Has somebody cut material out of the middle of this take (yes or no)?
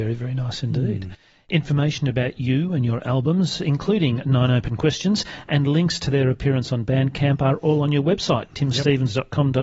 no